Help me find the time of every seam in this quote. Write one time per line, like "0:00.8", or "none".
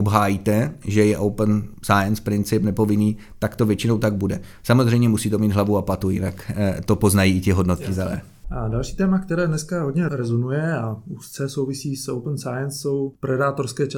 0:08.4